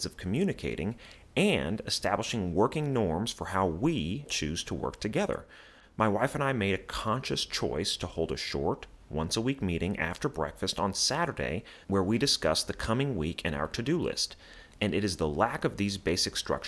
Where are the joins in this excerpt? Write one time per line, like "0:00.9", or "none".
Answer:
0:04.3
0:14.7